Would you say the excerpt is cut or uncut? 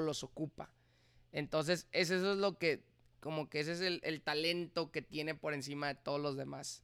uncut